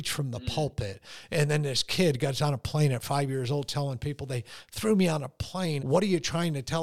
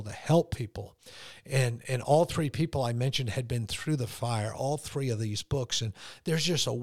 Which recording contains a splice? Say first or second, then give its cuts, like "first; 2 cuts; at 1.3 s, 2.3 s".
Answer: first; 1 cut; at 5.8 s